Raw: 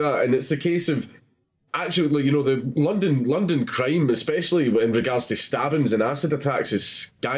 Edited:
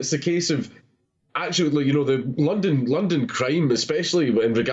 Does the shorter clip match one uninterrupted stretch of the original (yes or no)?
yes